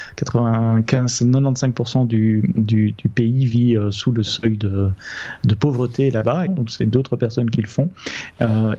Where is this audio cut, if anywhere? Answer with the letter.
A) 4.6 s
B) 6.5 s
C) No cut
B